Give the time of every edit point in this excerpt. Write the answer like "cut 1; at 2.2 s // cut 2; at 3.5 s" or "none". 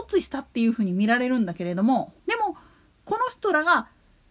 cut 1; at 2.2 s